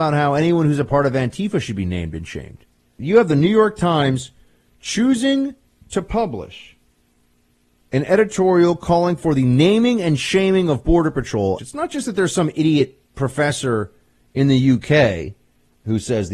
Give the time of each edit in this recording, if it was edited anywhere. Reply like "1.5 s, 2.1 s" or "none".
3.0 s, 11.6 s, 13.0 s